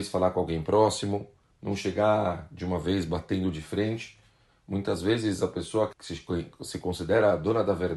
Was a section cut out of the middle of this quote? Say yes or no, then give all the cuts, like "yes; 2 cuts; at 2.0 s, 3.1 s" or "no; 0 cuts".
yes; 2 cuts; at 1.4 s, 5.9 s